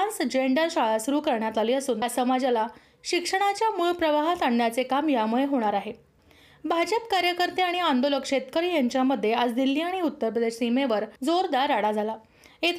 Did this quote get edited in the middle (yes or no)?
yes